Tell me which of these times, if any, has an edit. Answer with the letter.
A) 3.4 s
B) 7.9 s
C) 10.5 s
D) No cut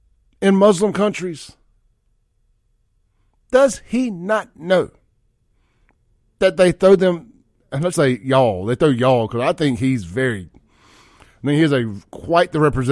B